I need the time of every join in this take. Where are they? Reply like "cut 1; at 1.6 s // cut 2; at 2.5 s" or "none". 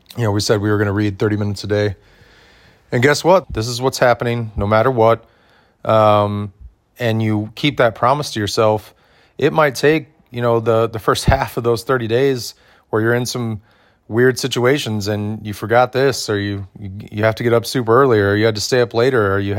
cut 1; at 3.4 s